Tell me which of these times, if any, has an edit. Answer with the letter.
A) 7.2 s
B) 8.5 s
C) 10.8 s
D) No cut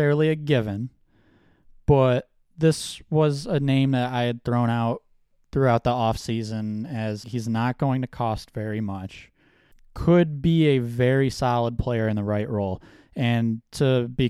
A